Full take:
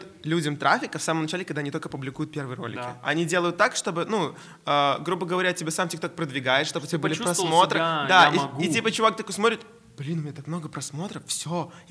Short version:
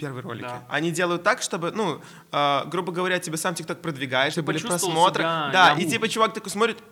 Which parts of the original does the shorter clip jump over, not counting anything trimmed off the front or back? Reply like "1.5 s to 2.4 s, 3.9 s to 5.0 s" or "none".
6.6 s to 6.9 s, 8.3 s to 8.6 s